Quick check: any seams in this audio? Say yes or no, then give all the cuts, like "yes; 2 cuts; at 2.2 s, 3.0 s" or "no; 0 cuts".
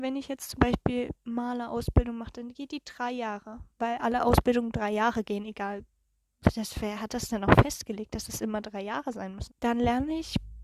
yes; 2 cuts; at 4.0 s, 9.5 s